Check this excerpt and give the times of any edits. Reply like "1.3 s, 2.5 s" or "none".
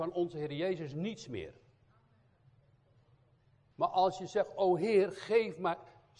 3.7 s

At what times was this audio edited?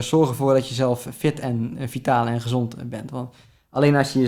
none

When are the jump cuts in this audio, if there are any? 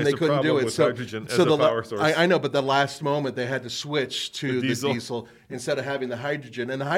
none

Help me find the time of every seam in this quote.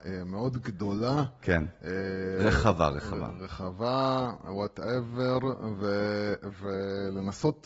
none

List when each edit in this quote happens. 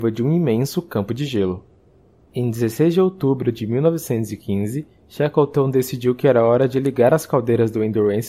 2.3 s

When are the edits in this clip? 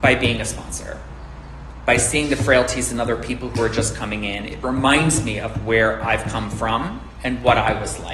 none

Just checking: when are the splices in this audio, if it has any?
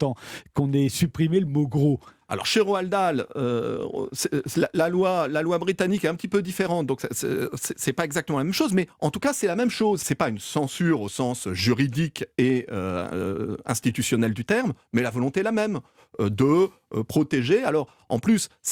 10.0 s

